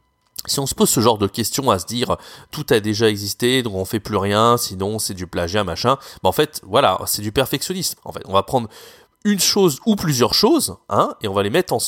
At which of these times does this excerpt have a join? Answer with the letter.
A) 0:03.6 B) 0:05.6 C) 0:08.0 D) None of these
C